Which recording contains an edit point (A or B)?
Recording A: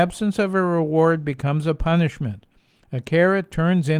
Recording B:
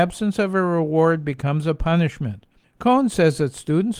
B